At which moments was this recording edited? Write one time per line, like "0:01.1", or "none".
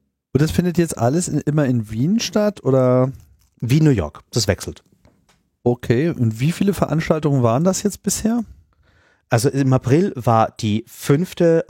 none